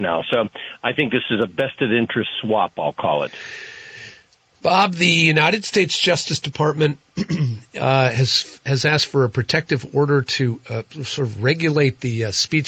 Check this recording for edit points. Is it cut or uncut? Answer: uncut